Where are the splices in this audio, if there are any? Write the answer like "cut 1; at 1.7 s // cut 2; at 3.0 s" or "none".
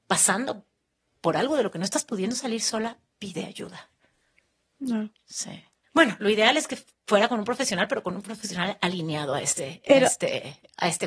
cut 1; at 5.8 s